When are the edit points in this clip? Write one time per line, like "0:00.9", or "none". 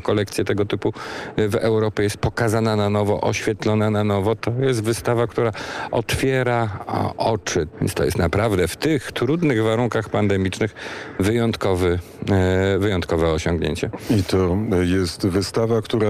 0:07.7

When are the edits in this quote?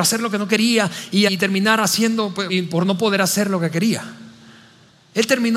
0:01.3
0:02.5

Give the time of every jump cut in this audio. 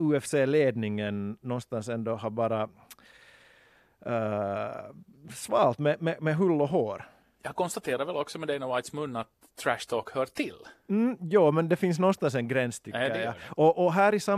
none

